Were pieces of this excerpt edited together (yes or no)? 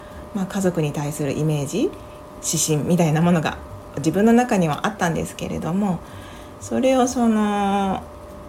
yes